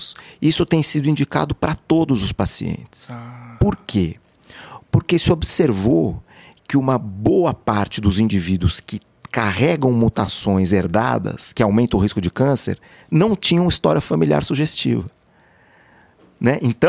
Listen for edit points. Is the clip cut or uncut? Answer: uncut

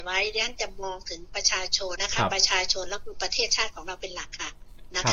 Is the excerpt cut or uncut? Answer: cut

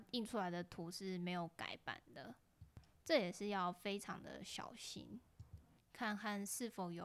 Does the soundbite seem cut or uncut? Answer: cut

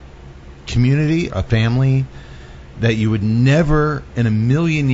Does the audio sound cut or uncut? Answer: cut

